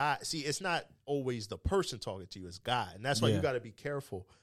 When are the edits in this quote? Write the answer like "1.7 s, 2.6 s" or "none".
none